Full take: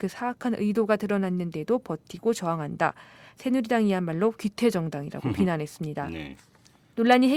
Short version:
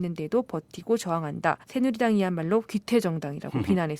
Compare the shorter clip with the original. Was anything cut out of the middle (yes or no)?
yes